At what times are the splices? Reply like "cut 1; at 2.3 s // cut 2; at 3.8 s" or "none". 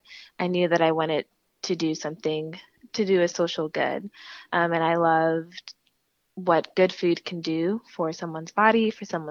cut 1; at 4.5 s